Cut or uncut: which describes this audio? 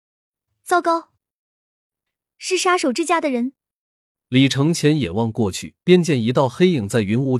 cut